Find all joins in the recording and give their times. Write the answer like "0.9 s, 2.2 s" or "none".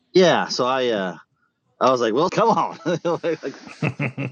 2.3 s